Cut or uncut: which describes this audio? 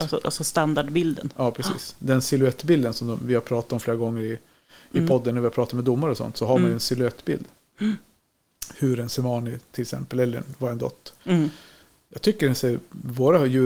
uncut